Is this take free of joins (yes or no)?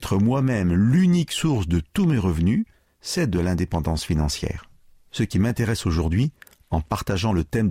yes